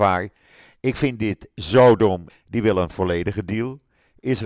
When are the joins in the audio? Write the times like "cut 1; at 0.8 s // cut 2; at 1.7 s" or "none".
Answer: cut 1; at 2.3 s